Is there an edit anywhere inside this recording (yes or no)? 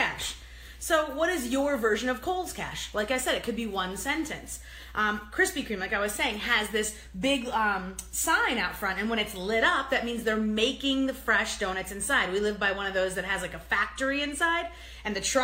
no